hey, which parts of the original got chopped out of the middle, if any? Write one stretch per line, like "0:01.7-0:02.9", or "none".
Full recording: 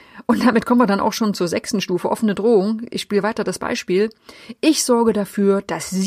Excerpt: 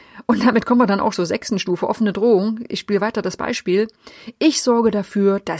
0:01.1-0:01.3